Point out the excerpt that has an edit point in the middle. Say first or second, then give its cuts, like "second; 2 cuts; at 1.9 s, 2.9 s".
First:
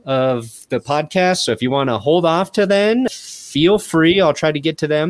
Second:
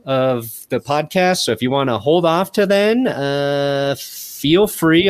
first; 1 cut; at 3.1 s